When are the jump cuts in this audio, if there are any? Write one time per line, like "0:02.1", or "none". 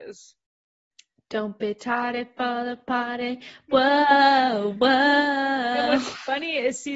none